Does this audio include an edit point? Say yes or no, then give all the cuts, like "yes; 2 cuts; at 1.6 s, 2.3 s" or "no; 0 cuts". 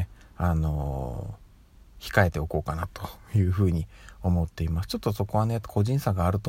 no; 0 cuts